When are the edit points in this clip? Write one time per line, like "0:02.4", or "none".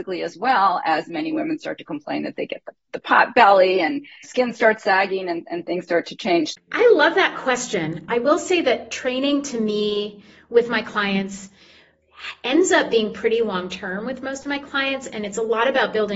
0:06.6
0:08.1